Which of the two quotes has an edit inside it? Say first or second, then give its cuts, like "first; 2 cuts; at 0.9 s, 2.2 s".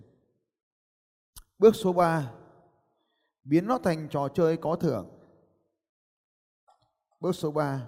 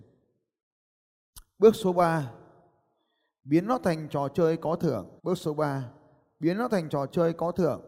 second; 1 cut; at 5.2 s